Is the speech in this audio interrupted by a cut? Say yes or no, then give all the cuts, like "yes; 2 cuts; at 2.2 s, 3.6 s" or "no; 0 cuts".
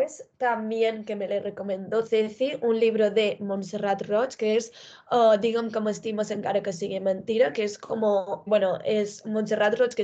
yes; 1 cut; at 8.5 s